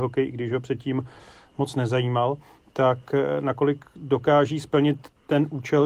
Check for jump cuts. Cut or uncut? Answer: uncut